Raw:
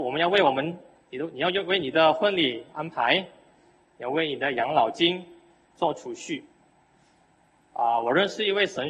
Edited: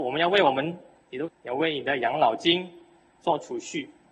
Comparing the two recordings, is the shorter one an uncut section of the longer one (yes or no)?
no